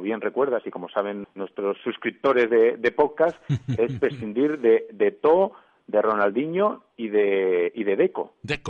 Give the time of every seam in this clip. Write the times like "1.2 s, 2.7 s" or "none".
1.2 s